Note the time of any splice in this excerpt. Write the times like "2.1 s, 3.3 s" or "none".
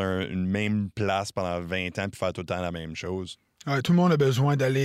none